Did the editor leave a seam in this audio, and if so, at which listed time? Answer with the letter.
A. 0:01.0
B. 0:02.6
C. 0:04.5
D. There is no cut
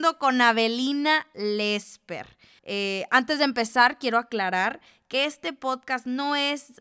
B